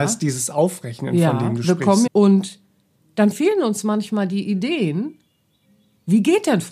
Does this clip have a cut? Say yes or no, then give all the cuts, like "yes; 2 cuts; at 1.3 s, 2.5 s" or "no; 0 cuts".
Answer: yes; 1 cut; at 2.1 s